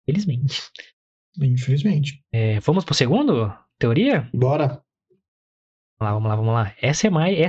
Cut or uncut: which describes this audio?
uncut